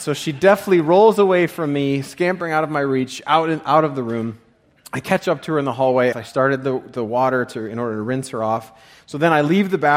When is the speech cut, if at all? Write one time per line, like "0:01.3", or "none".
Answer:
0:06.1